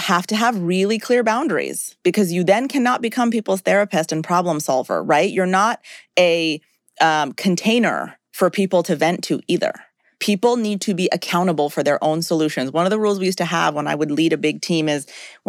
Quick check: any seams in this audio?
no; 0 cuts

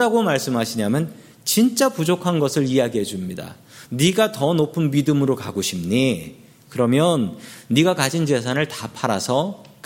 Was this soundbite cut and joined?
no; 0 cuts

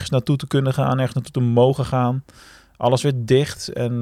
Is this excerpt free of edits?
yes; 0 cuts

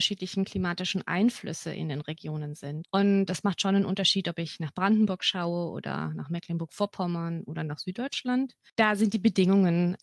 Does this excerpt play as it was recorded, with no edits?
no; 1 cut; at 2.8 s

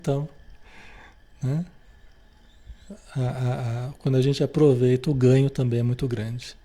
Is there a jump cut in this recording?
no; 0 cuts

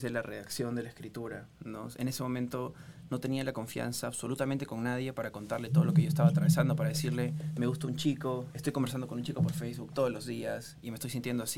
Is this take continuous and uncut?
yes; 0 cuts

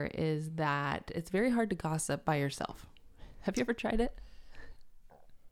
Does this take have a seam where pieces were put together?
no; 0 cuts

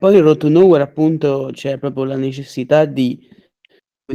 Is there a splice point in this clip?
no; 0 cuts

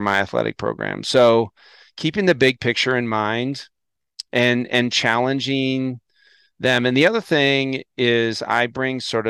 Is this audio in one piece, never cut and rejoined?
yes; 0 cuts

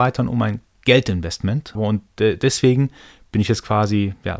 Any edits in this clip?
yes; 1 cut; at 1.7 s

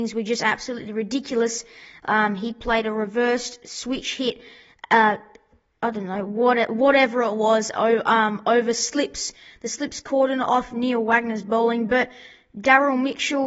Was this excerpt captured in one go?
yes; 0 cuts

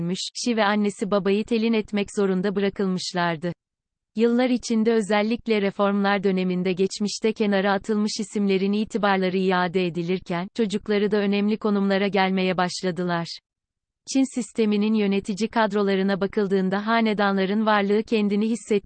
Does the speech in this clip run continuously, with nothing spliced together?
yes; 0 cuts

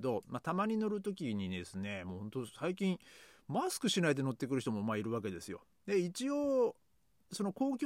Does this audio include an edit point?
no; 0 cuts

